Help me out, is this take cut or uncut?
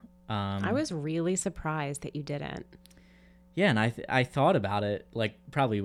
uncut